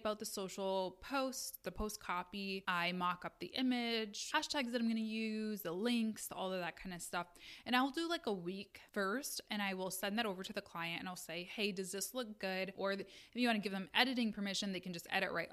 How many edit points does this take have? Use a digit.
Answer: 2